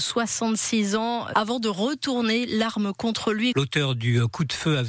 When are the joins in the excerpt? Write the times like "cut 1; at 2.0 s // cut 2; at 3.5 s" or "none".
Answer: cut 1; at 1.3 s // cut 2; at 3.5 s